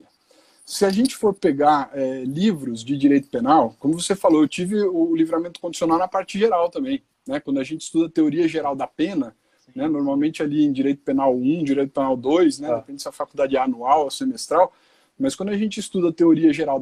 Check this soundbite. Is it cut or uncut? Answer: uncut